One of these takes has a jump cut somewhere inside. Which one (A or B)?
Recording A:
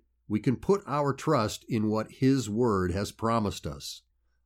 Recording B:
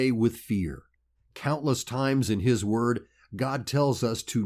B